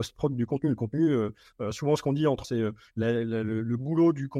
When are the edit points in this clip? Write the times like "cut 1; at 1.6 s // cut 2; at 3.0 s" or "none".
cut 1; at 2.4 s